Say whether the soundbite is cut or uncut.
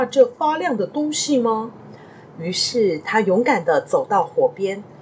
uncut